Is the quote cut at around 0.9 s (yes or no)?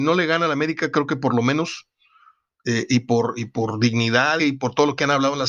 no